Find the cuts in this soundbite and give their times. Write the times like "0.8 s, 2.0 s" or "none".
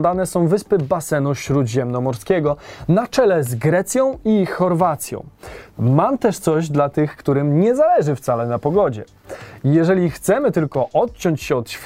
5.7 s